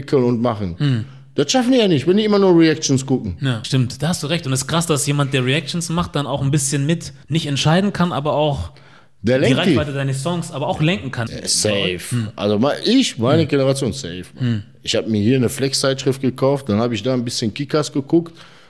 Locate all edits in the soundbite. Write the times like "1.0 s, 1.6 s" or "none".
7.2 s, 11.3 s